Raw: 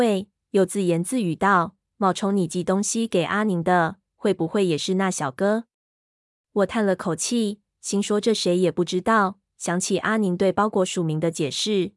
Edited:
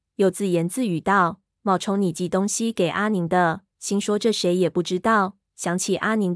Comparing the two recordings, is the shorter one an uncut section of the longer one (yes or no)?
no